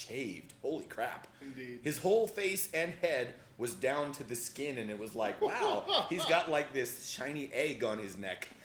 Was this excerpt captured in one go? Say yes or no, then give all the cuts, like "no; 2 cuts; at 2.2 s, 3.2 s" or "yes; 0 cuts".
yes; 0 cuts